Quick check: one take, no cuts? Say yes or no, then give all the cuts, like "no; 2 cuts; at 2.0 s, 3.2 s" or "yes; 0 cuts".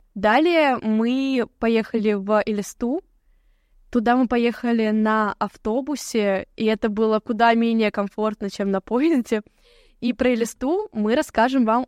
yes; 0 cuts